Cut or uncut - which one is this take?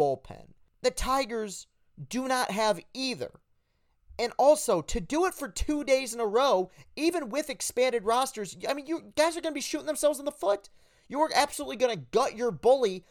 uncut